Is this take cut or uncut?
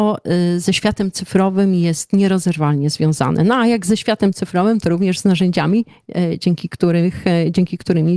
uncut